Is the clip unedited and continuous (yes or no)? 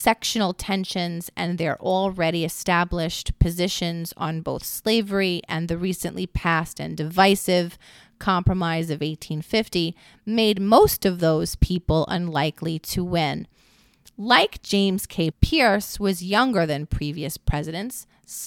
no